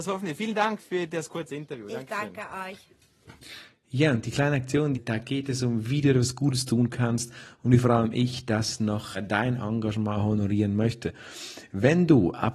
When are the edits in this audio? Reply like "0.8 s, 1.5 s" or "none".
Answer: 4.9 s, 9.1 s